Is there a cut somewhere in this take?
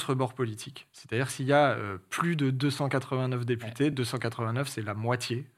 no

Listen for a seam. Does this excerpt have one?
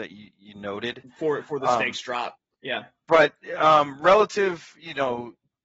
yes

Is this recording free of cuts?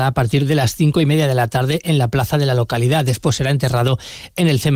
yes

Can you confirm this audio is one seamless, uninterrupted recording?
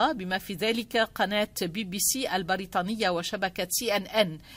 yes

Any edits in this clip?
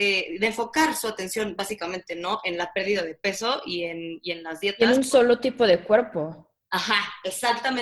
no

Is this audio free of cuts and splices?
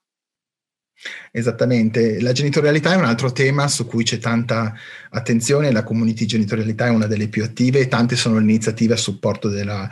yes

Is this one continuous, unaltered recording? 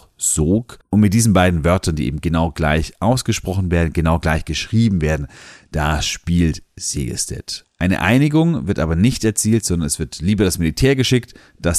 no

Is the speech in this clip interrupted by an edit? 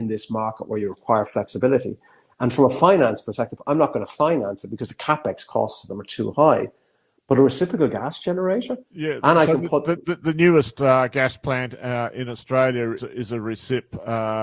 yes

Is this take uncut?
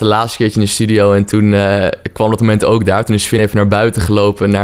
yes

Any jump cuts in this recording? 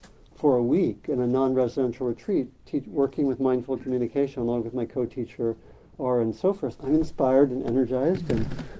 yes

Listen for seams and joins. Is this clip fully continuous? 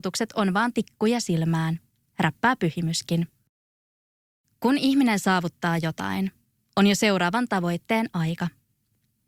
yes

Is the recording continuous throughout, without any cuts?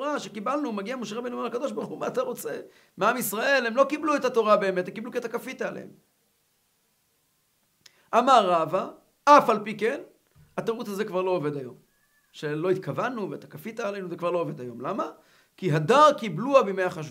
yes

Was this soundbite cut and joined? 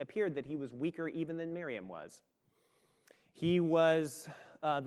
no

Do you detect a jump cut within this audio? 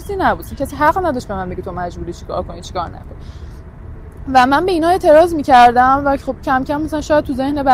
no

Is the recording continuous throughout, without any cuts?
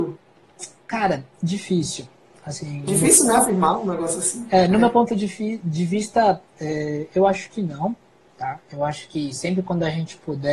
yes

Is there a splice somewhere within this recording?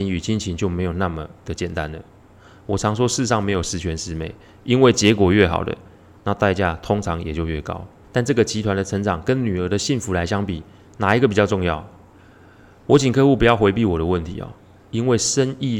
yes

